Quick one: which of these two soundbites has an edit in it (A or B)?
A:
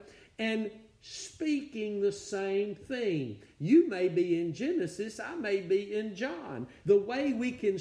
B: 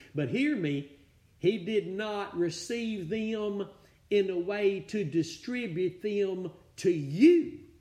A